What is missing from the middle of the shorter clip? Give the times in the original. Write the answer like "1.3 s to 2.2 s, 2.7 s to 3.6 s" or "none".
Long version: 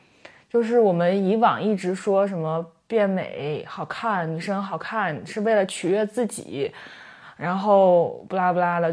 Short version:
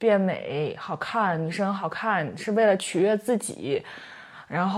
none